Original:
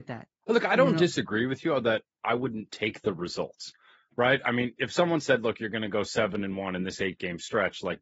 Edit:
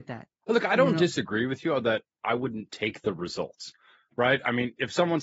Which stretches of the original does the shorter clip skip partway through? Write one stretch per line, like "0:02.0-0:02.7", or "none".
none